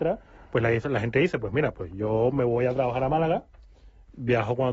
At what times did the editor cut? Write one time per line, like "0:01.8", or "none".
none